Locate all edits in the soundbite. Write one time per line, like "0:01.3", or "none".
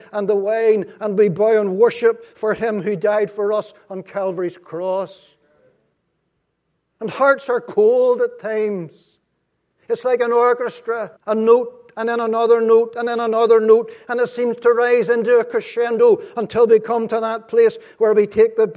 0:06.8
0:09.7
0:11.2